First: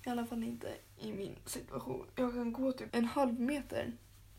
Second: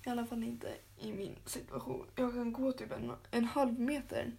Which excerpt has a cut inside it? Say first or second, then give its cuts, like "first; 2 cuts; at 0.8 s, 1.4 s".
first; 1 cut; at 2.9 s